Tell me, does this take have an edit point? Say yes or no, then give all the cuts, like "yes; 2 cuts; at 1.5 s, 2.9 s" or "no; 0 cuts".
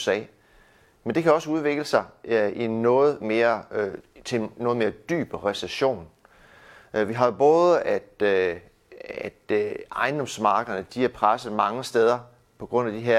no; 0 cuts